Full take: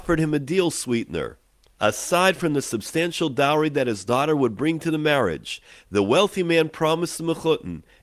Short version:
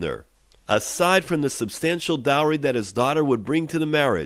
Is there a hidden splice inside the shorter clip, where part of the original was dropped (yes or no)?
no